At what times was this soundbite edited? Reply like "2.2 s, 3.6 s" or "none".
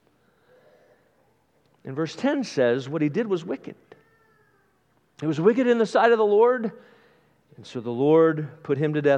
none